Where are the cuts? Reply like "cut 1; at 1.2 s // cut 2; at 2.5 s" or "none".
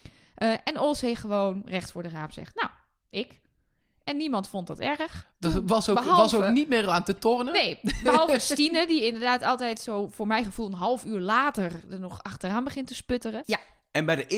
cut 1; at 13.4 s